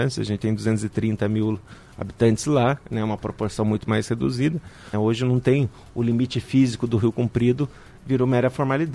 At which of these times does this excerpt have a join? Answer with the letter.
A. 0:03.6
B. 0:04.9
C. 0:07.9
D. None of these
B